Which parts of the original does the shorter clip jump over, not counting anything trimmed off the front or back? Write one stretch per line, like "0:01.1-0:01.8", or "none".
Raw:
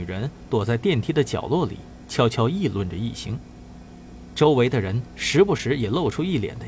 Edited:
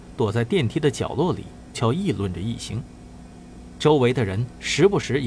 0:02.1-0:02.3